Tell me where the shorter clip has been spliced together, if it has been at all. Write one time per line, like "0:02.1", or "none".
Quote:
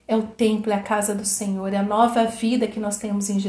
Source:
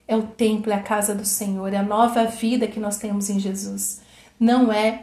none